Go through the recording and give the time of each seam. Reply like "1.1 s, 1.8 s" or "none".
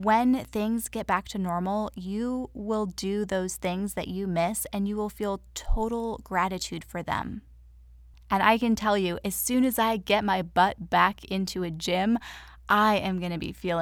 none